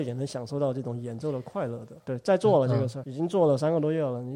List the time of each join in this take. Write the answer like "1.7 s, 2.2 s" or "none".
2.0 s, 3.0 s